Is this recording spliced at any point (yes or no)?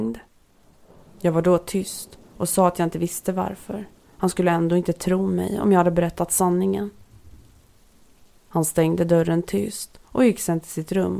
no